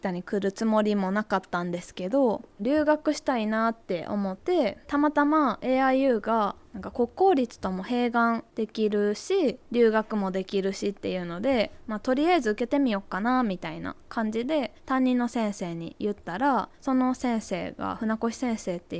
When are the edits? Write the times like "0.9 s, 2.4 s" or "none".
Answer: 4.4 s